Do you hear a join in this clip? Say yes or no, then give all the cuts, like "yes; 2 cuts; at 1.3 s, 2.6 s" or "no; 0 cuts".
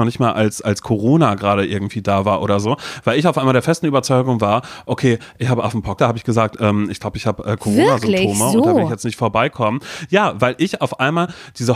yes; 1 cut; at 6.0 s